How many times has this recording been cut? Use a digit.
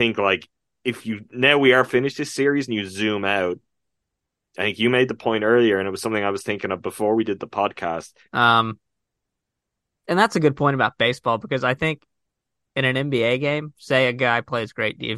1